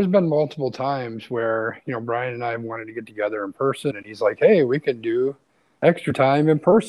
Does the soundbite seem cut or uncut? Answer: cut